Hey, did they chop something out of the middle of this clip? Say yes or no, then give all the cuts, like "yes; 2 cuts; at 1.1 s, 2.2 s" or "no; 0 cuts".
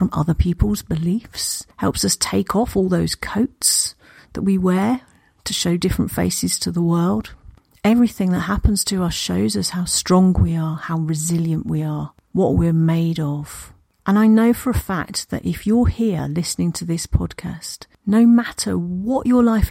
no; 0 cuts